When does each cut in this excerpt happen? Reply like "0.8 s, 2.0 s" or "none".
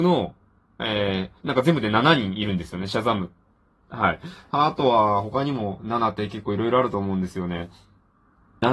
1.4 s